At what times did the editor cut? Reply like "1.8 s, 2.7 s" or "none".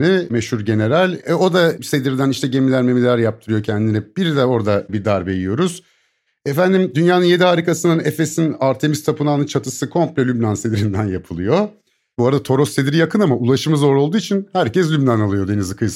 none